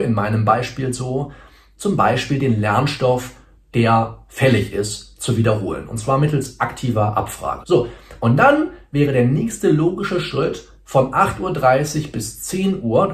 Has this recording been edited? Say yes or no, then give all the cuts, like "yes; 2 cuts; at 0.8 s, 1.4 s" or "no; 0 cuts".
yes; 1 cut; at 7.6 s